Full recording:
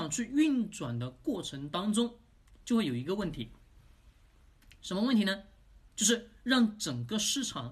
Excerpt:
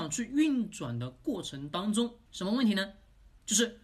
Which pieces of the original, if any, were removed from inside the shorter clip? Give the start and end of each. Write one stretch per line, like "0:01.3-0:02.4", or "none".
0:02.3-0:04.8